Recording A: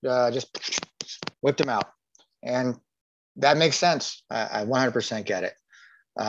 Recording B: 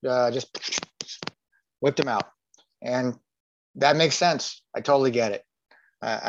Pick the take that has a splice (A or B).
A